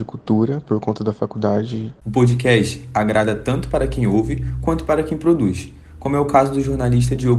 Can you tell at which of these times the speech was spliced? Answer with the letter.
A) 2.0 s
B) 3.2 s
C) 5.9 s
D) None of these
A